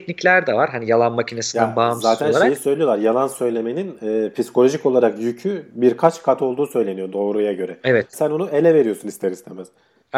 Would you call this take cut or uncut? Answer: cut